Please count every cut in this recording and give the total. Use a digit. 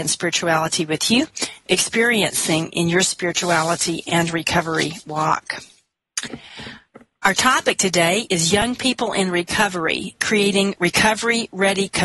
1